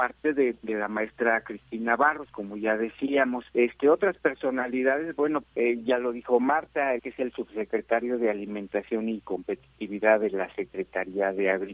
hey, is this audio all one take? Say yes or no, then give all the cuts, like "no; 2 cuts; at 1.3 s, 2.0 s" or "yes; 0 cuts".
no; 3 cuts; at 3.5 s, 5.4 s, 7.0 s